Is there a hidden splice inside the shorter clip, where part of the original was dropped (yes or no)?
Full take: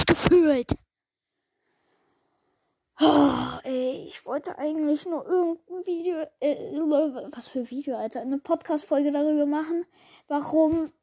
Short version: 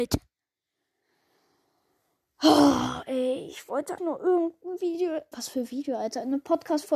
yes